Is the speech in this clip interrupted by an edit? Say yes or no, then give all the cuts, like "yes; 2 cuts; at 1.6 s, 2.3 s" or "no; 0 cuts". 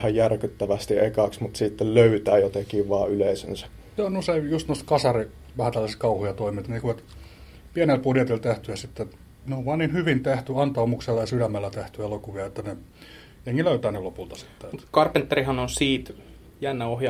yes; 1 cut; at 6.7 s